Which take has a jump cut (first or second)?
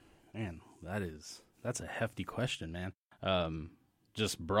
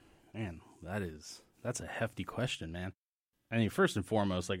first